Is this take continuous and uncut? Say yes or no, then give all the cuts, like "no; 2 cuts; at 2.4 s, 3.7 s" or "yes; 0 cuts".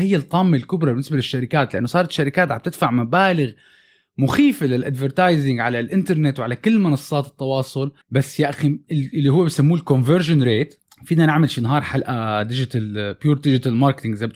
no; 1 cut; at 8.0 s